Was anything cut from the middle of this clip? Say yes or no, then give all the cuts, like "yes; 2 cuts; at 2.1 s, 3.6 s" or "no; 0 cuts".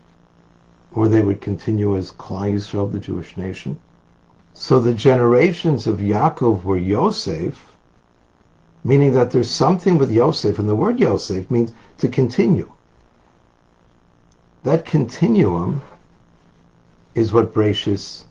yes; 1 cut; at 4.4 s